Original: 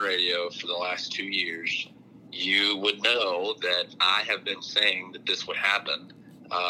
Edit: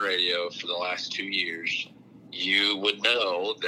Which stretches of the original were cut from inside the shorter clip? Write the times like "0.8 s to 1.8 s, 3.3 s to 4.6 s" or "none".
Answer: none